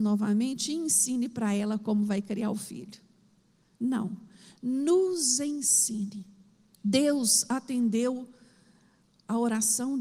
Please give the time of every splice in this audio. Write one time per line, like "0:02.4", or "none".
0:06.7